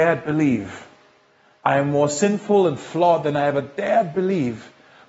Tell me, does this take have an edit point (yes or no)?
yes